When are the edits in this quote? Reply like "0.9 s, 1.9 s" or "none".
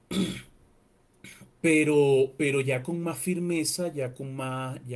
none